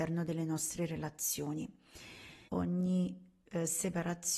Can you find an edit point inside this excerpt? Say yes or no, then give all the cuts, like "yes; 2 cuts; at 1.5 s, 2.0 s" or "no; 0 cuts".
yes; 1 cut; at 2.5 s